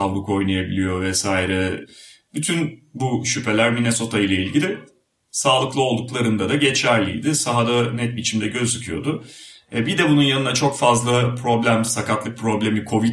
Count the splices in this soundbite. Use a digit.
0